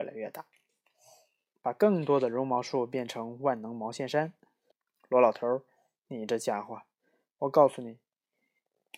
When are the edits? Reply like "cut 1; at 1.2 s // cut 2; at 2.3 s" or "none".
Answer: cut 1; at 4.7 s